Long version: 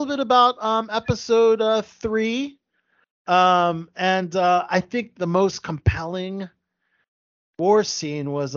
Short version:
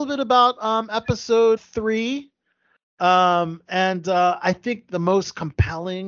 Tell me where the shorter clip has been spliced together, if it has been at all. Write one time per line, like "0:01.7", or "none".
0:01.6